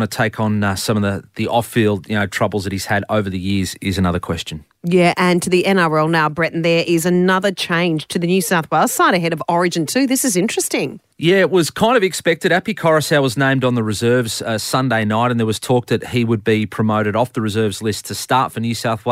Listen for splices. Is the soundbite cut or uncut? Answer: uncut